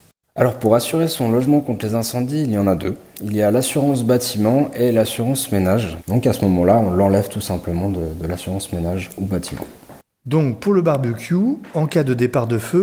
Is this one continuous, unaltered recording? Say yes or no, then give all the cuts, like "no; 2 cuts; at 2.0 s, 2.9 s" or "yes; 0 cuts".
no; 1 cut; at 6.0 s